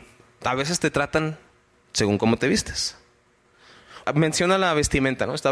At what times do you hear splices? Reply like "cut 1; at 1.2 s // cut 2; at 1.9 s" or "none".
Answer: cut 1; at 4.0 s